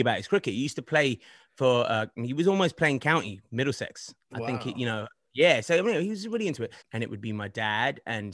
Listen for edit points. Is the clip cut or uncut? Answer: cut